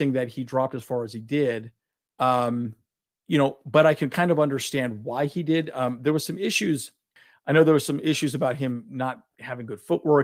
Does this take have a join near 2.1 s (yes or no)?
no